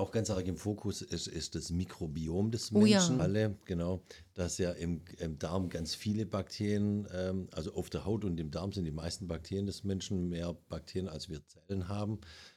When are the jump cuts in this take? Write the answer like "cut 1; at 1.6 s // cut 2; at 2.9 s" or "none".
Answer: cut 1; at 3.2 s